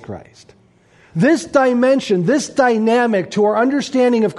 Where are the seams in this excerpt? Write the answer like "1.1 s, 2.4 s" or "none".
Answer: 1.1 s